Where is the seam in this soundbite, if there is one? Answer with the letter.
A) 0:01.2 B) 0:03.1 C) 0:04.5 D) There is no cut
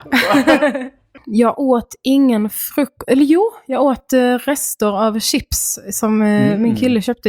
A